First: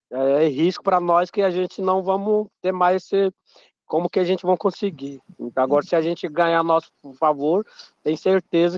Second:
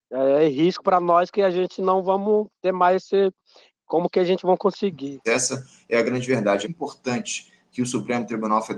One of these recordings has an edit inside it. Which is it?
second; 2 cuts; at 5.2 s, 6.6 s

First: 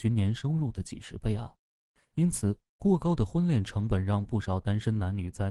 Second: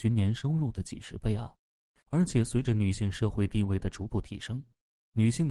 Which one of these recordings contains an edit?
second; 1 cut; at 2.0 s

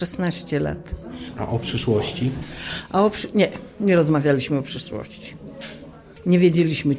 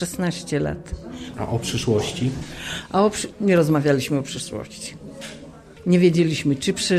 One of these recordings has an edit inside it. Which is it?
second; 1 cut; at 3.3 s

